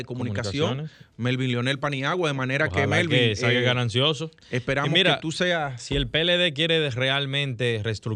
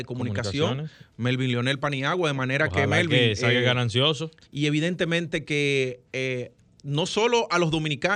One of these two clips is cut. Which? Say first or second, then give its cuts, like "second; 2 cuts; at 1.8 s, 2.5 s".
second; 1 cut; at 4.4 s